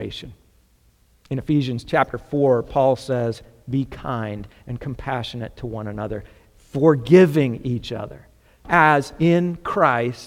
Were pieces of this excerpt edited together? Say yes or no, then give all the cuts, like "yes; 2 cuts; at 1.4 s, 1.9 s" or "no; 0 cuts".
yes; 1 cut; at 8.6 s